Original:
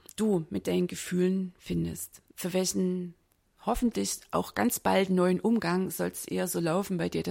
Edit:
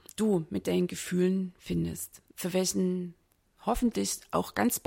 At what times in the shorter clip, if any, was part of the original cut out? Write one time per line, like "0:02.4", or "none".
none